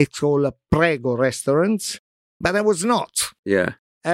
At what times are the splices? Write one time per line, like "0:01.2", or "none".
0:02.4